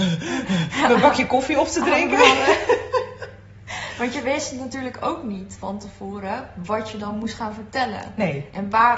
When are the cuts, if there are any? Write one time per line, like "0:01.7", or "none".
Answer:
none